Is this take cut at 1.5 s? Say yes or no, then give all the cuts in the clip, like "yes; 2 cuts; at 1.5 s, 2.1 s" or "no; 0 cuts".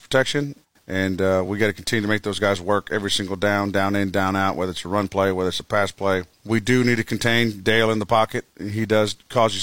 no; 0 cuts